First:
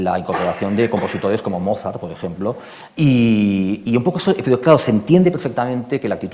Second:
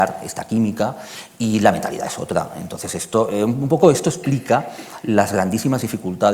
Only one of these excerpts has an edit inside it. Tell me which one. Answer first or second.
first